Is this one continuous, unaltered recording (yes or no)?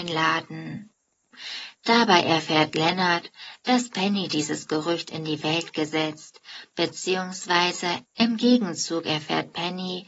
no